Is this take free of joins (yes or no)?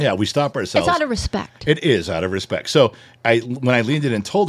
yes